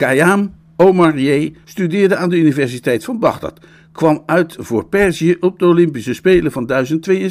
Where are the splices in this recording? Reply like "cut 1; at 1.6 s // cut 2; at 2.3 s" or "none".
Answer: cut 1; at 1.6 s